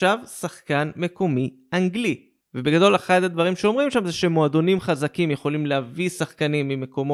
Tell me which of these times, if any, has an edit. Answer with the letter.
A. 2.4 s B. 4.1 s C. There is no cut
A